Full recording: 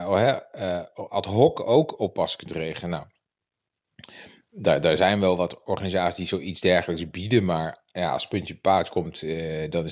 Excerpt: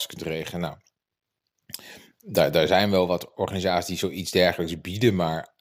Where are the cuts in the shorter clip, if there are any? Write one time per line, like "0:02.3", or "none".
none